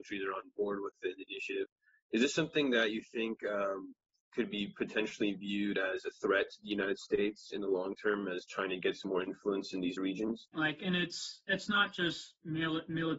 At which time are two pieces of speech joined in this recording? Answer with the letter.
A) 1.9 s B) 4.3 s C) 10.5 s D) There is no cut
C